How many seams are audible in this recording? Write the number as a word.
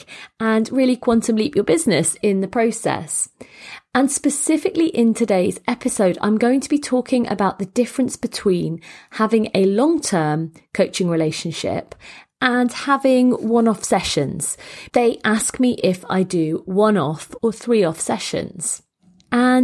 two